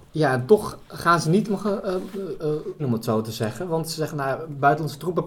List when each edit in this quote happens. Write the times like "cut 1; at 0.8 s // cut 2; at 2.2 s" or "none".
cut 1; at 2.8 s

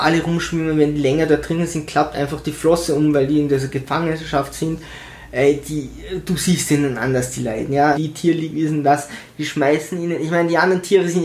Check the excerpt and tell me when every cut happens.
cut 1; at 7.9 s

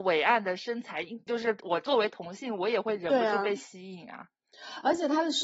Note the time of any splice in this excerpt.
cut 1; at 1.3 s

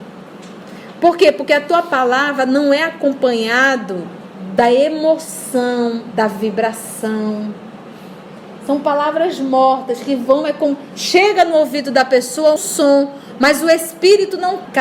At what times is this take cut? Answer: cut 1; at 6.1 s // cut 2; at 12.6 s

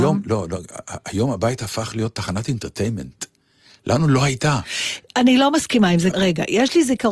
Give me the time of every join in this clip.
cut 1; at 6.1 s

